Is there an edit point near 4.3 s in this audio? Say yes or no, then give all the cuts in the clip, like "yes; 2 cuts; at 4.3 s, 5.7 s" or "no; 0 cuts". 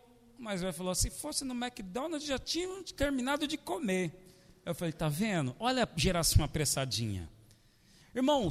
no; 0 cuts